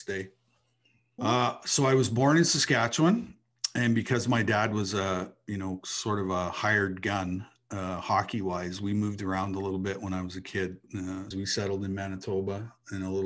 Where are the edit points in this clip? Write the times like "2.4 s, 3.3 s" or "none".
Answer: 1.2 s, 11.3 s